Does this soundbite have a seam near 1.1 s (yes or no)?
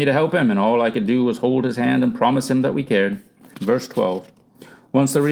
no